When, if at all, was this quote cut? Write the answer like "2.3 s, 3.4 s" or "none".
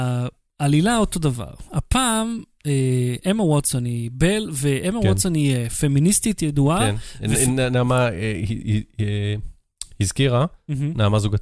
none